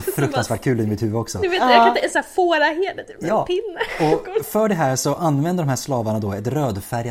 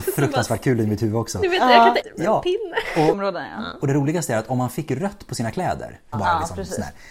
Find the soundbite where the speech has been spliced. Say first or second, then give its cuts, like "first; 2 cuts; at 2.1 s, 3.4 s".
second; 3 cuts; at 2.0 s, 3.1 s, 6.1 s